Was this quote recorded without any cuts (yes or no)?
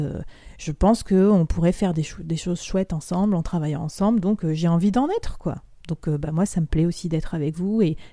yes